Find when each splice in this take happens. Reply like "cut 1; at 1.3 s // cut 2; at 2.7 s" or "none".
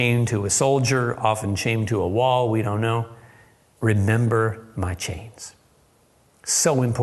none

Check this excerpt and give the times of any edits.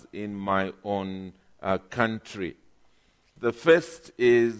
cut 1; at 3.4 s

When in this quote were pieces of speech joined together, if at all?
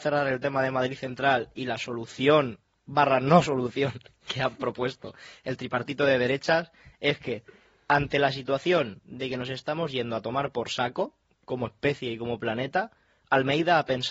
cut 1; at 1.5 s

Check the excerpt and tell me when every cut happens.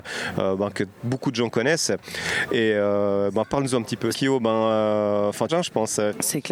cut 1; at 4.1 s // cut 2; at 5.5 s

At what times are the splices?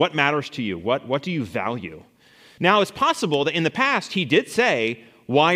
cut 1; at 2.6 s

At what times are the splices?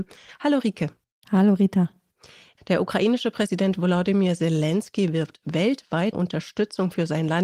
cut 1; at 2.6 s // cut 2; at 6.1 s

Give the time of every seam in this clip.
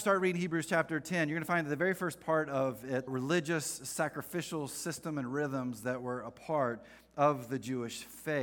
cut 1; at 3.1 s

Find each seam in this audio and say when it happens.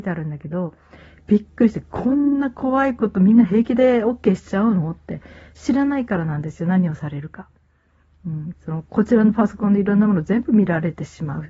cut 1; at 8.5 s

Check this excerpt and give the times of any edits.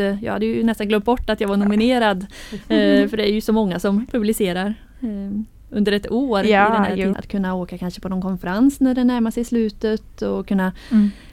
cut 1; at 7.1 s

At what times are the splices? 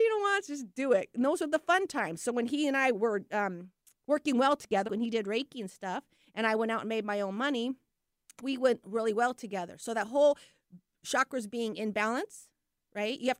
cut 1; at 4.9 s

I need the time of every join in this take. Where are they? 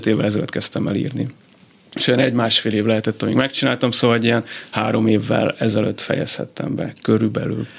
none

